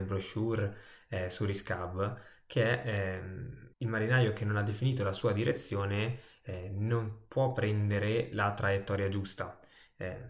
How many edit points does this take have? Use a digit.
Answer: 1